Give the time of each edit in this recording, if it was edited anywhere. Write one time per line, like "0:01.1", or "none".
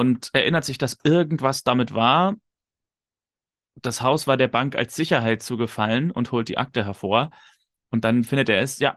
none